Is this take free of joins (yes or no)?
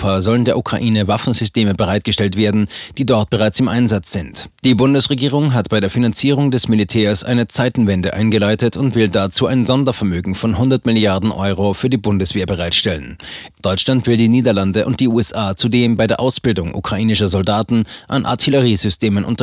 no